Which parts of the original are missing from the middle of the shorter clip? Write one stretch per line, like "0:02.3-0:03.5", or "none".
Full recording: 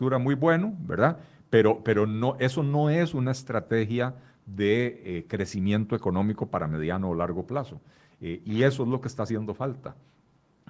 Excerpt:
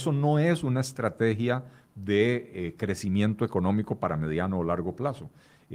none

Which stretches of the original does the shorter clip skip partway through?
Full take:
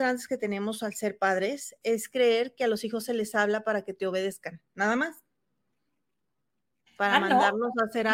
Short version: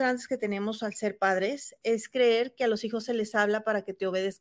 none

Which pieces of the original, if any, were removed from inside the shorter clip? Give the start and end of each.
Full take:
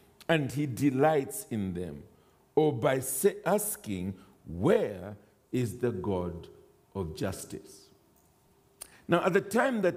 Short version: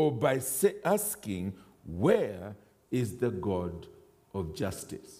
none

